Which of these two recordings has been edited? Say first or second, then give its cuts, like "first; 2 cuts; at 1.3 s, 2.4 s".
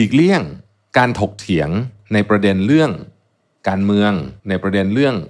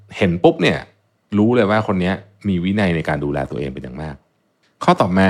first; 1 cut; at 4.4 s